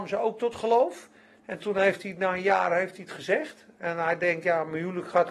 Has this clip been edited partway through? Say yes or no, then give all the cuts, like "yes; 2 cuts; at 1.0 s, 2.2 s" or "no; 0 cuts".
no; 0 cuts